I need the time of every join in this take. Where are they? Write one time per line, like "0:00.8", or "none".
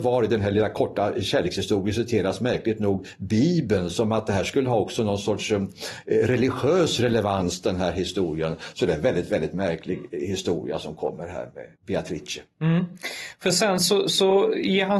0:11.8